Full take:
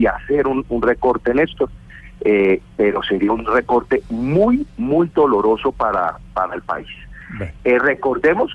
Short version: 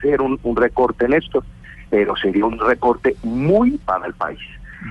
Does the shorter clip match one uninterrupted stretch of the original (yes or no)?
no